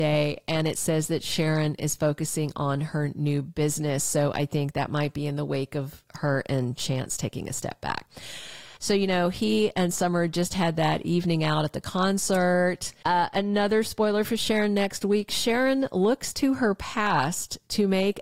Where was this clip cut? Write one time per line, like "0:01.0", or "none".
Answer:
0:08.8
0:13.0